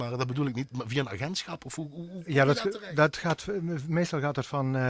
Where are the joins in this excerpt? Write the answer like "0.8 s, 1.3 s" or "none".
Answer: none